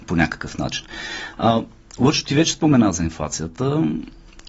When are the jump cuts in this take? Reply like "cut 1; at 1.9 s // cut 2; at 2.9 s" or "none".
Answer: none